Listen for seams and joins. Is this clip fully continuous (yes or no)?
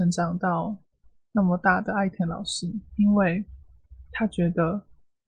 no